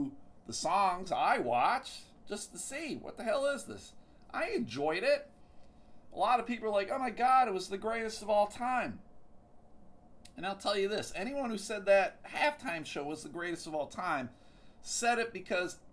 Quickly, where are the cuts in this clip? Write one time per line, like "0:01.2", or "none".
none